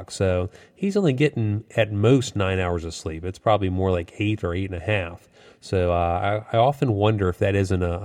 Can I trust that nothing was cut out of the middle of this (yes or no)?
yes